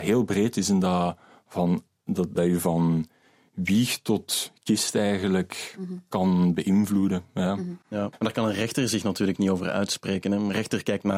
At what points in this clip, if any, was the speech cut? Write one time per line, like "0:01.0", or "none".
0:02.4
0:08.1